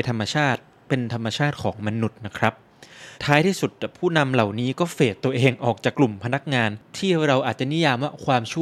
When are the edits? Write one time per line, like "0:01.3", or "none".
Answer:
0:03.2
0:05.9